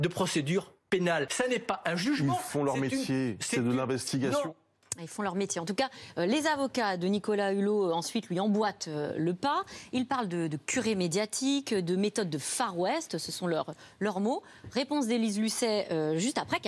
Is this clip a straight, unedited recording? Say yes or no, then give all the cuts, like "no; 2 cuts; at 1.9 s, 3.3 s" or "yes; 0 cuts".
no; 1 cut; at 1.3 s